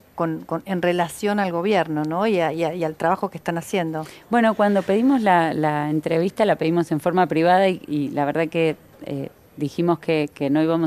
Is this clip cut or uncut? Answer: uncut